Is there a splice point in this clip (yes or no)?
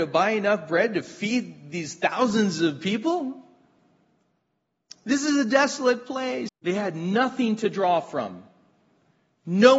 yes